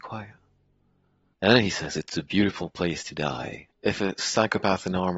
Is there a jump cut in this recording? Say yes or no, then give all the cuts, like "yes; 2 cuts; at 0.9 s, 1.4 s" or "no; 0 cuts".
yes; 2 cuts; at 1.3 s, 3.7 s